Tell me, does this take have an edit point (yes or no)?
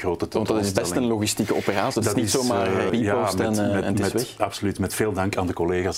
yes